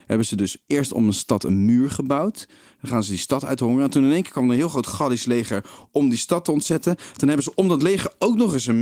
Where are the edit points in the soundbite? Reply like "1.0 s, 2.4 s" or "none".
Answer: none